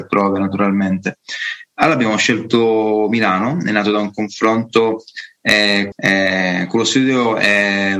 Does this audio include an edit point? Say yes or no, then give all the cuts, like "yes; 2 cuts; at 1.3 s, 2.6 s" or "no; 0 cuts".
yes; 2 cuts; at 1.7 s, 5.9 s